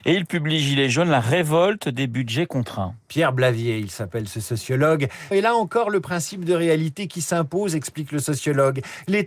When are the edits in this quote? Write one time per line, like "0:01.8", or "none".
0:05.3